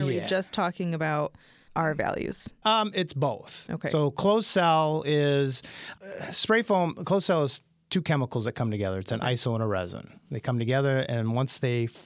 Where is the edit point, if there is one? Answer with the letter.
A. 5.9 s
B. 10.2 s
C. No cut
A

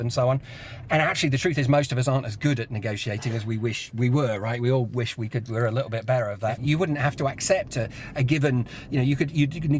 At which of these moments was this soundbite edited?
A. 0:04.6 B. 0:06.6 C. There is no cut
B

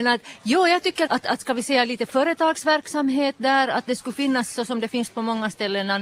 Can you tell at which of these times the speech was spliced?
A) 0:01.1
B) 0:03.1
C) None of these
A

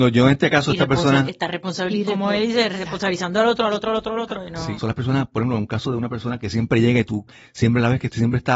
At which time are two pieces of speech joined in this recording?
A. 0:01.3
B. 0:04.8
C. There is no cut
B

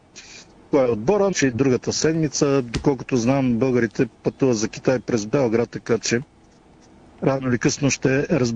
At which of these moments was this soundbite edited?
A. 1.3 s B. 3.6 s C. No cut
A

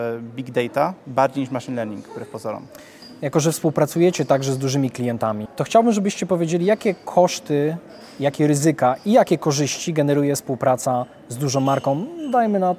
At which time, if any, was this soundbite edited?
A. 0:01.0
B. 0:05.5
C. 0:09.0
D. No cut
B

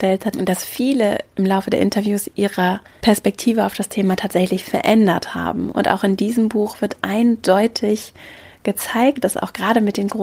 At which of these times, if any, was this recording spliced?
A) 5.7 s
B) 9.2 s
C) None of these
A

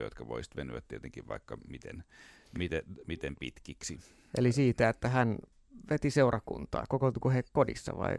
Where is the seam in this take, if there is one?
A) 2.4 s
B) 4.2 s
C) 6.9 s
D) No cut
D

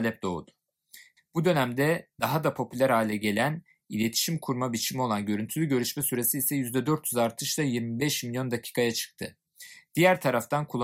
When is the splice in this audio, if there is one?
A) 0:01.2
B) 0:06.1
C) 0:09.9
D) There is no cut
A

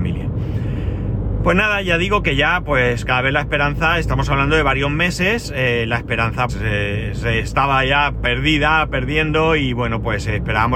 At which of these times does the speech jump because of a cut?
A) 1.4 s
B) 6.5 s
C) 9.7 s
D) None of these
B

